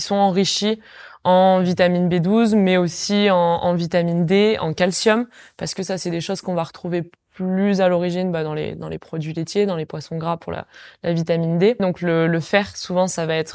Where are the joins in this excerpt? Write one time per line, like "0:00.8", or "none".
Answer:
0:11.8